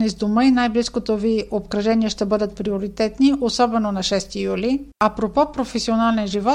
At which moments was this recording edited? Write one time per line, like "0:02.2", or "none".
0:04.9

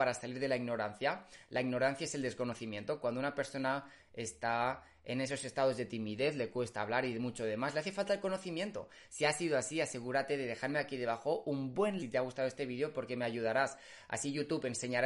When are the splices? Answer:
0:09.1
0:12.0

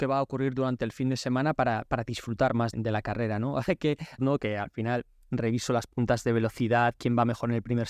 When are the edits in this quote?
0:02.7
0:04.2

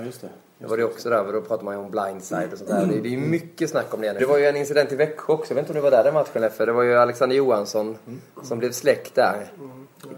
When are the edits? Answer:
0:04.2

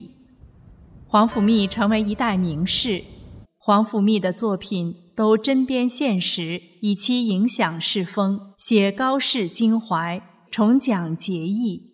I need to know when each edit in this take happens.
0:03.4
0:08.5
0:10.5

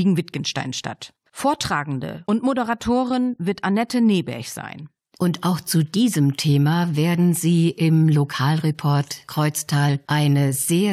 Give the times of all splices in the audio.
0:01.3
0:05.1

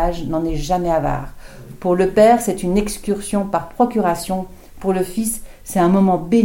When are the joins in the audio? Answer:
none

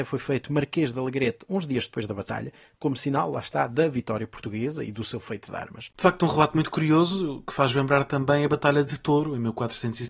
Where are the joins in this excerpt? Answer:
0:05.9

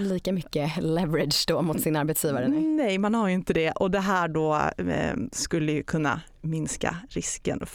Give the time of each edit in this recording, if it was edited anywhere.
none

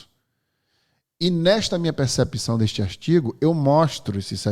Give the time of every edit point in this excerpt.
none

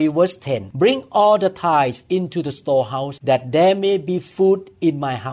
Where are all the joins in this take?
none

